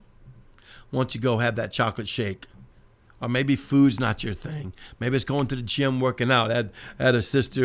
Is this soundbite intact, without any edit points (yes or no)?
yes